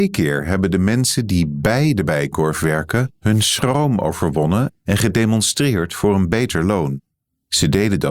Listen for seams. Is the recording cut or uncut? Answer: uncut